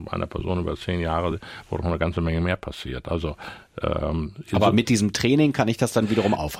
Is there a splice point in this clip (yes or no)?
no